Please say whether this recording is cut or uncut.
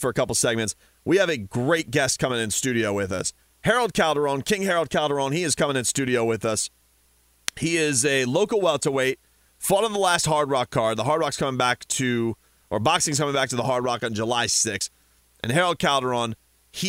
uncut